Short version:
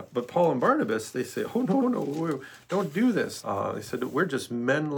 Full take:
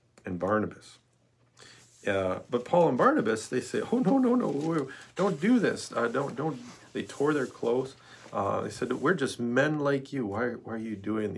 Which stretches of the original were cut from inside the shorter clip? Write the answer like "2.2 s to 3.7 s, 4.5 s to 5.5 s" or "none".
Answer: 4.2 s to 4.3 s, 5.9 s to 8.3 s